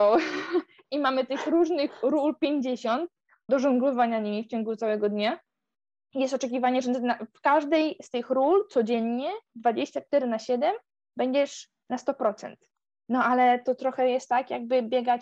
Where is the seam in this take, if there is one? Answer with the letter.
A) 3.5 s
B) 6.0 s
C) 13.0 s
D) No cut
A